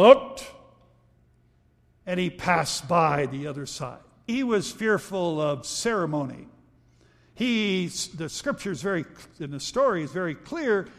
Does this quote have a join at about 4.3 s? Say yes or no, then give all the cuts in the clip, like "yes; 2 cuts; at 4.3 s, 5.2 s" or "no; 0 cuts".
yes; 1 cut; at 4.3 s